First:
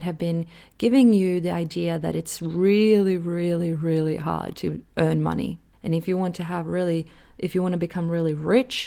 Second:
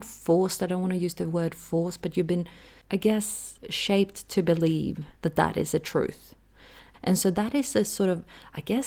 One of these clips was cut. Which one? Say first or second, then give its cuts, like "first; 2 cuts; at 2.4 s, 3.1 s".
second; 2 cuts; at 5.2 s, 6.9 s